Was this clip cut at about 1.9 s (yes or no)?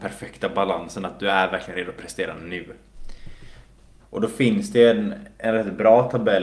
no